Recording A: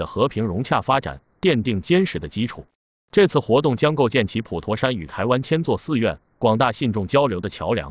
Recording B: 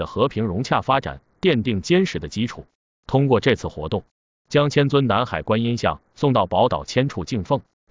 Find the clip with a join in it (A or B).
B